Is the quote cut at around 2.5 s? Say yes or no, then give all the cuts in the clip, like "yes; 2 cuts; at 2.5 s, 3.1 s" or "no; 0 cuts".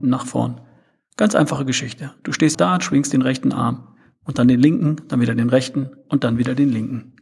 yes; 1 cut; at 2.5 s